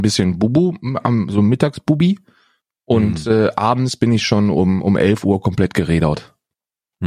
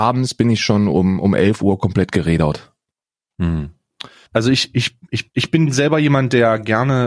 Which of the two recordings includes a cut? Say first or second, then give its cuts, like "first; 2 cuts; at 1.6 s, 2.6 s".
second; 2 cuts; at 4.3 s, 5.3 s